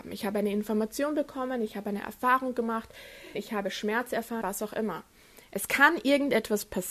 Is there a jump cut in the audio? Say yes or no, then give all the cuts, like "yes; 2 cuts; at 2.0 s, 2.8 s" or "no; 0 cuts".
yes; 2 cuts; at 3.3 s, 4.4 s